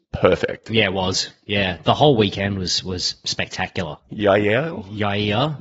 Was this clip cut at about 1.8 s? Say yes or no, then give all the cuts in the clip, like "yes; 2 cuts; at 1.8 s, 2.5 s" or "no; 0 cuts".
no; 1 cut; at 4.1 s